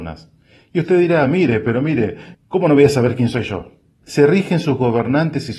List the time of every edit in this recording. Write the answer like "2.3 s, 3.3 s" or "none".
2.3 s, 4.0 s